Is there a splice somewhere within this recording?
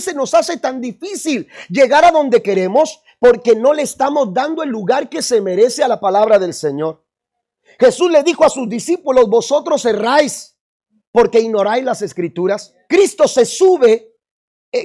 yes; 1 cut; at 12.9 s

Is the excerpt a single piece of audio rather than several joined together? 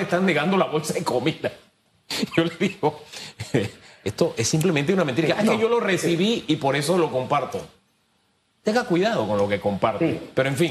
yes; 0 cuts

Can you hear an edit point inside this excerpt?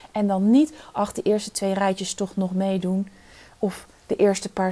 no; 0 cuts

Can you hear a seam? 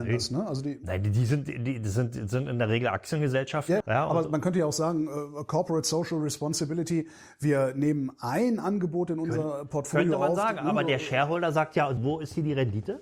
yes; 2 cuts; at 3.8 s, 12.0 s

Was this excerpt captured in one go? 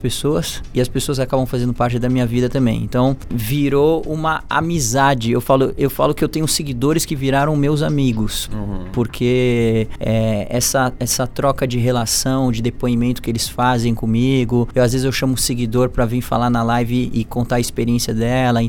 yes; 0 cuts

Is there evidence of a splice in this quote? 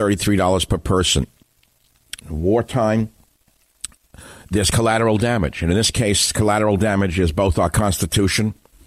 yes; 1 cut; at 2.2 s

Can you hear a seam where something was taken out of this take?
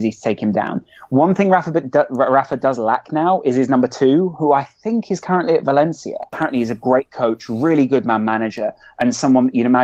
yes; 1 cut; at 6.3 s

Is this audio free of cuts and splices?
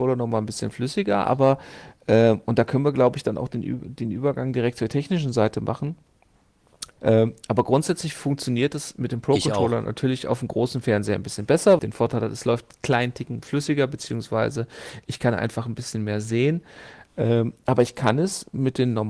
no; 2 cuts; at 7.0 s, 11.8 s

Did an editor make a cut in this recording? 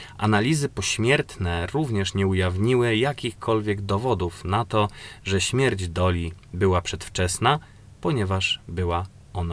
no; 0 cuts

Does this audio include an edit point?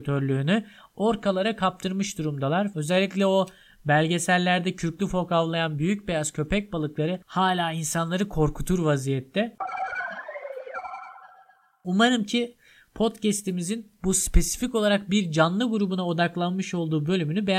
yes; 1 cut; at 2.7 s

